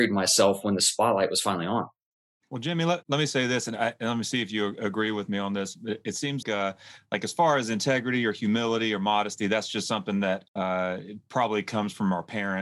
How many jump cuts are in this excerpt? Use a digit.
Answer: 2